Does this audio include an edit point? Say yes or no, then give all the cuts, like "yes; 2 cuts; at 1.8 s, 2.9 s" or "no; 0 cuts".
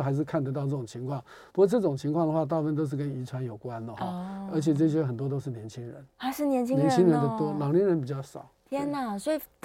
no; 0 cuts